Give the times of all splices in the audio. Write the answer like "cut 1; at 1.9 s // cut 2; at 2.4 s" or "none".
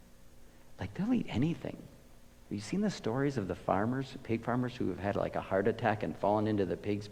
none